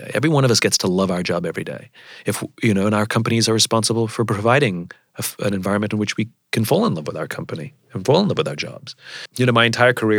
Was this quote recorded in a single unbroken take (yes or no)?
no